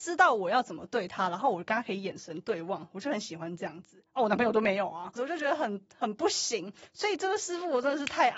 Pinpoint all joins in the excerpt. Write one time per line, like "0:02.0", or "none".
0:05.2